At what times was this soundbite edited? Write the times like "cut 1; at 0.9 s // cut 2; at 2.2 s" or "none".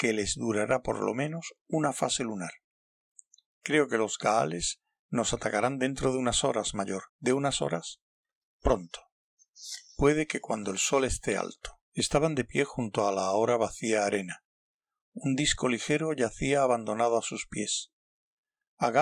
cut 1; at 3.5 s // cut 2; at 7.1 s // cut 3; at 11.8 s